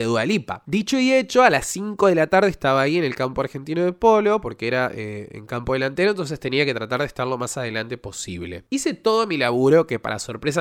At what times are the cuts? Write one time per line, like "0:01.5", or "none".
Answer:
none